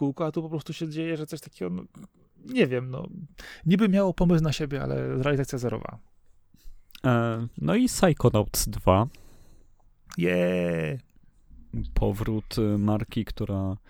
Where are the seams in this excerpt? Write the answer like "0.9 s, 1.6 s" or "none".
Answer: none